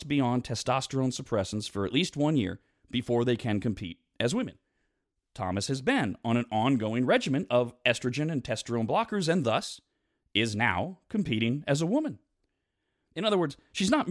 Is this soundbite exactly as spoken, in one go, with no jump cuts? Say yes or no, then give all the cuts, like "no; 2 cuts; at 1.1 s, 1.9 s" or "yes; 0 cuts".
yes; 0 cuts